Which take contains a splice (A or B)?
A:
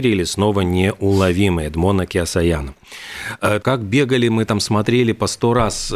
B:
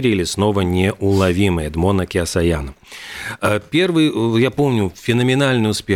A